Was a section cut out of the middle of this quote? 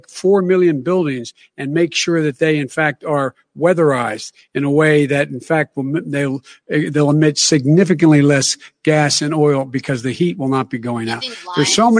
no; 0 cuts

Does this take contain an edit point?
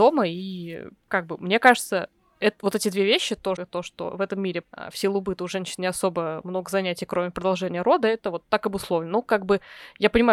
yes; 2 cuts; at 3.6 s, 4.6 s

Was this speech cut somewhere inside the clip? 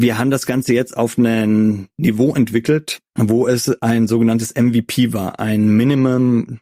no; 0 cuts

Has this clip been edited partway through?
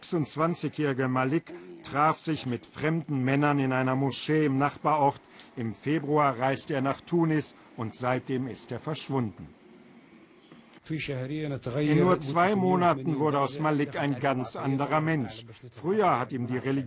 no; 0 cuts

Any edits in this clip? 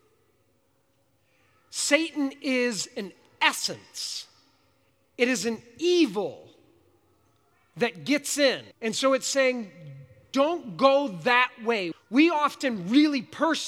yes; 2 cuts; at 8.7 s, 11.9 s

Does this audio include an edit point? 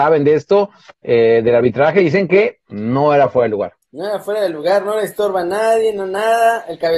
yes; 2 cuts; at 2.6 s, 3.8 s

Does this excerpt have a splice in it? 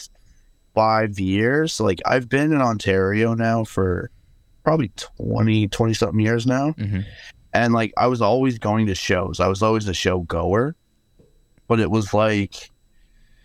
no; 0 cuts

